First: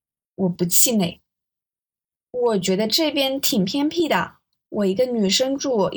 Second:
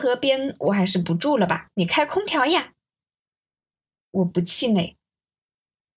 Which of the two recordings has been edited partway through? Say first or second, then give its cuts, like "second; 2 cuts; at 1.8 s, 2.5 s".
second; 1 cut; at 1.7 s